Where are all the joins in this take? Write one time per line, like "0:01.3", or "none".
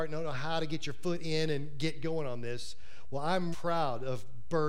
0:03.5